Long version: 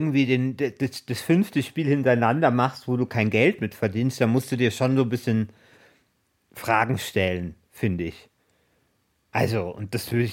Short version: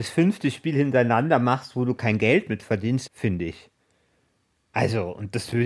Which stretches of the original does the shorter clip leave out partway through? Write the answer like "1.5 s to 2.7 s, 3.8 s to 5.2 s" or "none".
4.2 s to 7.7 s